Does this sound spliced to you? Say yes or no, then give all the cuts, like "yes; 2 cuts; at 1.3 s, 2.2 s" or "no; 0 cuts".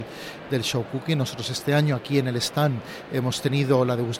no; 0 cuts